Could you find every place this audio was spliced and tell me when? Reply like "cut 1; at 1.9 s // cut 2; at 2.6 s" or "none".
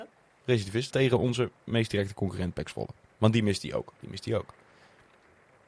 cut 1; at 0.9 s // cut 2; at 3.9 s